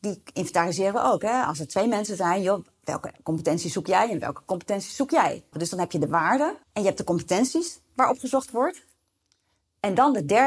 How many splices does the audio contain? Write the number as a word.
two